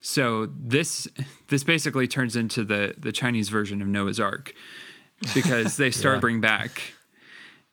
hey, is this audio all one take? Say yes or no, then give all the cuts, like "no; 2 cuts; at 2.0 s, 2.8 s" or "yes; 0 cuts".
no; 1 cut; at 6.2 s